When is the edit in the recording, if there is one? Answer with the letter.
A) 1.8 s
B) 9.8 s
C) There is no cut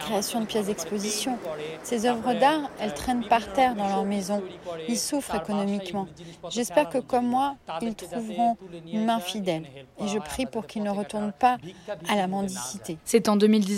C